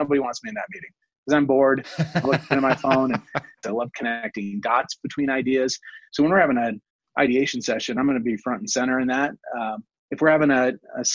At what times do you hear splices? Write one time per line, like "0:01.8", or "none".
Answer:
0:03.6